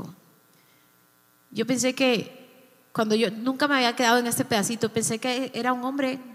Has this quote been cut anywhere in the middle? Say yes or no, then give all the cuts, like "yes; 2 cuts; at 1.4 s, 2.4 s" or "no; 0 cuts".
no; 0 cuts